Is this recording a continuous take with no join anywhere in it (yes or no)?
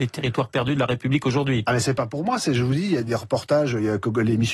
yes